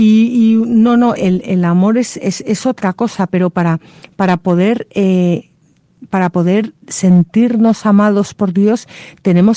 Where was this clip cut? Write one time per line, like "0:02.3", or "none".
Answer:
0:01.2